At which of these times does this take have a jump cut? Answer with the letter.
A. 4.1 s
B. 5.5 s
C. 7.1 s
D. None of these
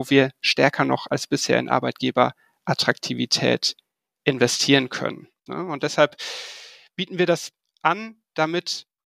B